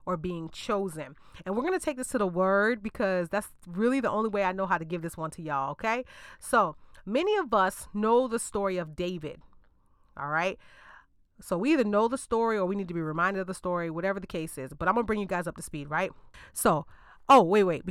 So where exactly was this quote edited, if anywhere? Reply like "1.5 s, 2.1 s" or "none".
none